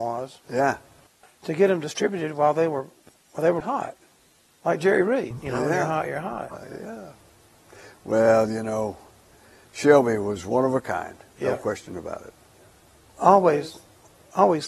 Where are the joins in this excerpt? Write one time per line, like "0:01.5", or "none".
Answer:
0:03.6